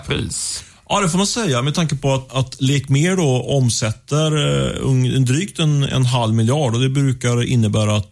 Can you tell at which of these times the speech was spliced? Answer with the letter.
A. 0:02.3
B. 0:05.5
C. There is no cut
A